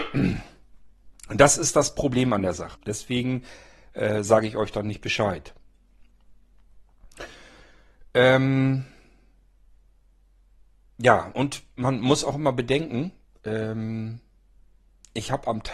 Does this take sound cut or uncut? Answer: cut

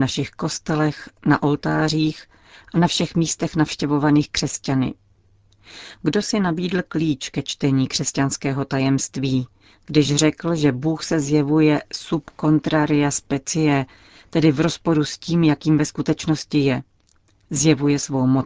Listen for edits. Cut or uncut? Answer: uncut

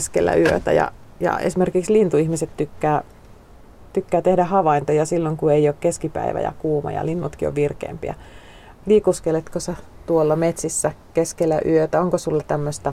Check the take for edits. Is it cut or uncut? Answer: uncut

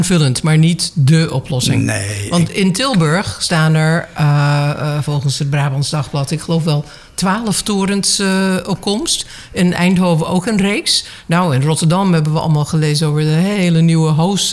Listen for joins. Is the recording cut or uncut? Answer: uncut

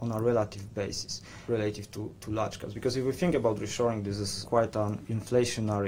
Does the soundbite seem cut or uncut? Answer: uncut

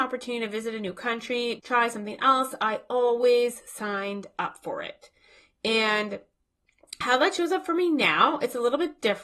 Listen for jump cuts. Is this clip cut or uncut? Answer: cut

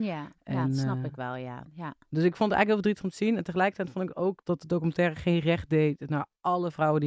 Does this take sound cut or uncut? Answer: cut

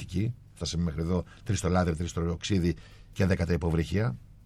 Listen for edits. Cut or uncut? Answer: cut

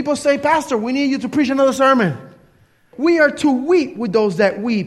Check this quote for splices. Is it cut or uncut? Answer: cut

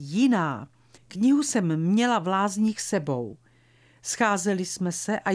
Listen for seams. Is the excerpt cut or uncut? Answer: cut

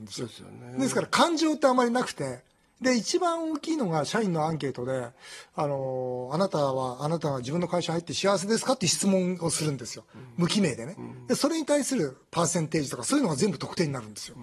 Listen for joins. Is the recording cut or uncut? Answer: uncut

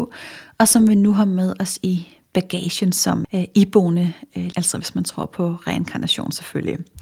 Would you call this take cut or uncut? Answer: cut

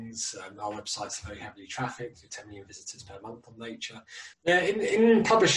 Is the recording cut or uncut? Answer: cut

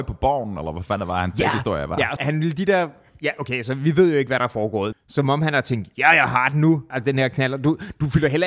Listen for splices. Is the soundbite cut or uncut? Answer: cut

